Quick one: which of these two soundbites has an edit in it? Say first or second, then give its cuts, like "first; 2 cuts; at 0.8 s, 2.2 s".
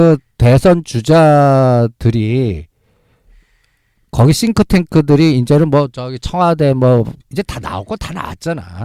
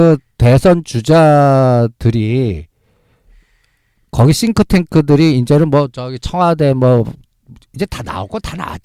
first; 1 cut; at 7.2 s